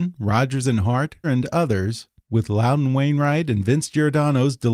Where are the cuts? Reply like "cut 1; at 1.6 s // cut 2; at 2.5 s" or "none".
cut 1; at 1.2 s